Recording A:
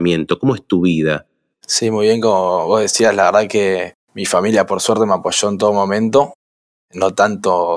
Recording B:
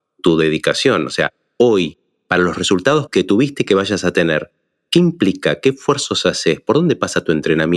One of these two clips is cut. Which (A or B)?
A